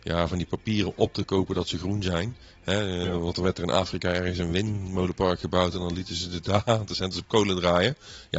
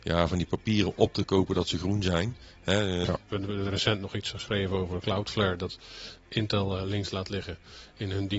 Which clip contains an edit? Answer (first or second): second